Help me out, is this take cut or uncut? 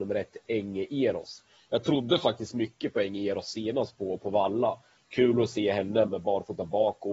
cut